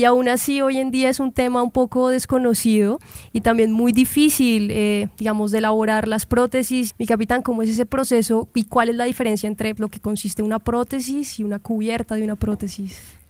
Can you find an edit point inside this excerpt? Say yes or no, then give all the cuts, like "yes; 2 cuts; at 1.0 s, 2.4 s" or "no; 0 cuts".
yes; 2 cuts; at 6.9 s, 9.8 s